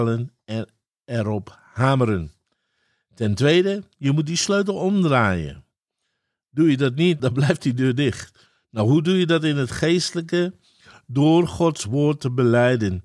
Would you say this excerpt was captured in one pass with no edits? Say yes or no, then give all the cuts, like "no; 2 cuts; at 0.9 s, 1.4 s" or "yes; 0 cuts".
no; 1 cut; at 7.2 s